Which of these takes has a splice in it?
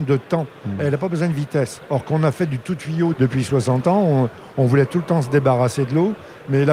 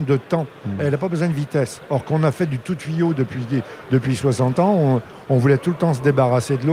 first; 1 cut; at 3.1 s

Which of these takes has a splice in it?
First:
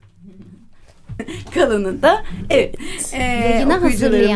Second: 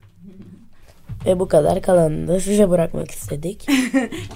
first; 1 cut; at 1.2 s

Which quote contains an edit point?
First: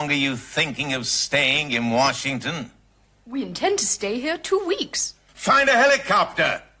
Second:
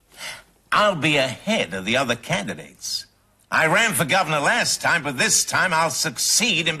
first; 1 cut; at 5.3 s

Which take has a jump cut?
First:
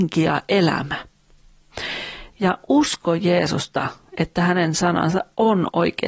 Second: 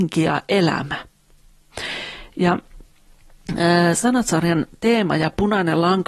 first; 1 cut; at 2.3 s

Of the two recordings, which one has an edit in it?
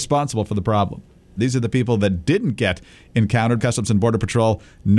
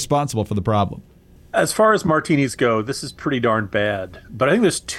first; 2 cuts; at 1.4 s, 3.6 s

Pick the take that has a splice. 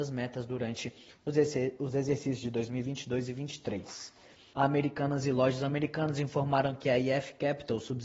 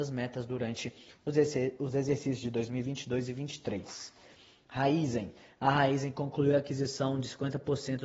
first; 1 cut; at 4.5 s

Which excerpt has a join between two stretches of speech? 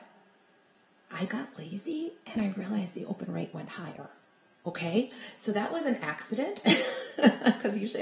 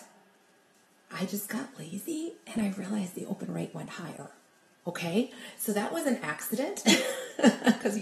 first; 1 cut; at 1.3 s

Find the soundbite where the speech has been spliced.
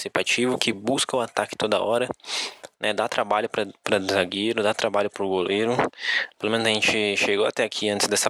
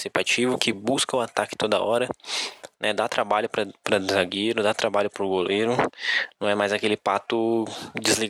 first; 1 cut; at 6.3 s

